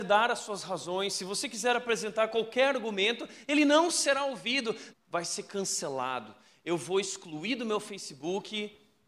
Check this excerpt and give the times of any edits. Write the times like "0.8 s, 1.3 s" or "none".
4.9 s